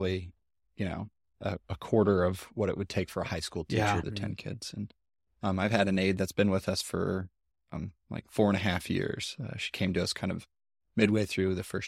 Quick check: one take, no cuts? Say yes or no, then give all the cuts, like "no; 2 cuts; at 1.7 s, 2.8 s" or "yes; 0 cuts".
no; 1 cut; at 4.0 s